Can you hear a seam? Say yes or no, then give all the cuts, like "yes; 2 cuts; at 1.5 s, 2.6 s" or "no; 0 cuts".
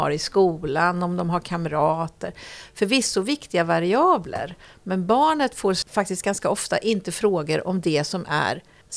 no; 0 cuts